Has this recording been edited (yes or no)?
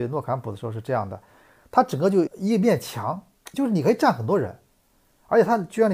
yes